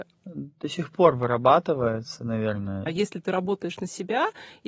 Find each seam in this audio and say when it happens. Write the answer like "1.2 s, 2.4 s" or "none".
2.9 s

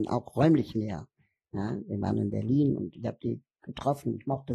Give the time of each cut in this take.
none

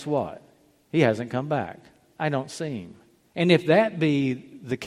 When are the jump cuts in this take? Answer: 3.3 s

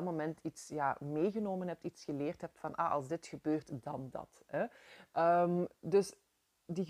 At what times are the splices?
none

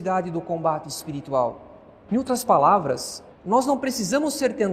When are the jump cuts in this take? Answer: 2.1 s, 3.3 s

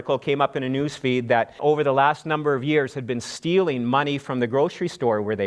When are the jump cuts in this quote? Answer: 1.6 s

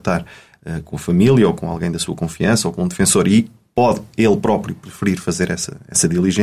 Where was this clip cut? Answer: none

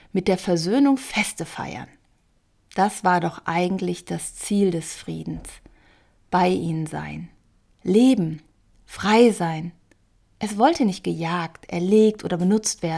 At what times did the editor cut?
none

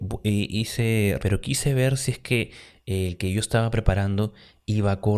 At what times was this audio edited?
1.2 s

